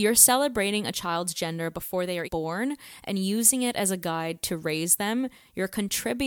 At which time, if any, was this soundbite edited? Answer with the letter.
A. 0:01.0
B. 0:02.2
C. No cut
B